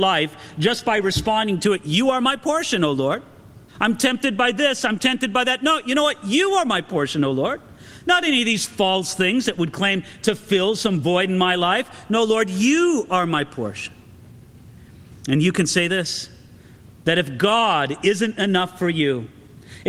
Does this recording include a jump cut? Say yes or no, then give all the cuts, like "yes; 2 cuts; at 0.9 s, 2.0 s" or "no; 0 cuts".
yes; 1 cut; at 3.7 s